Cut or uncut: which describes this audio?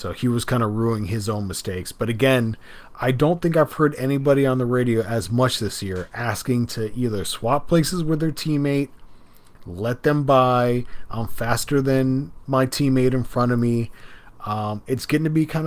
cut